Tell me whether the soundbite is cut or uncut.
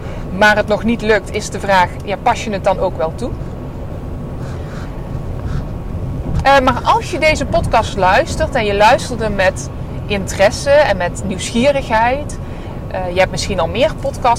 uncut